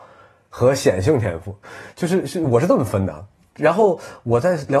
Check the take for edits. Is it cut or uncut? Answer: uncut